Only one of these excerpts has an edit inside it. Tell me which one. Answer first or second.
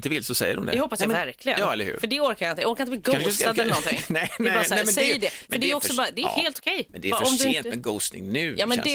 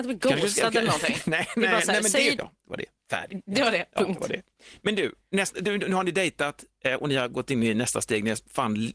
second